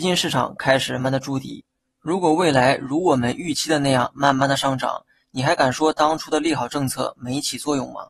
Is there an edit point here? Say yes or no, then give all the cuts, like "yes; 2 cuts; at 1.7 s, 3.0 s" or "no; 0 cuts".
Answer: yes; 1 cut; at 1.0 s